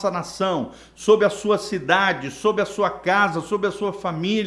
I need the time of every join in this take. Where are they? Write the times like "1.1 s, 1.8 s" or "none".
none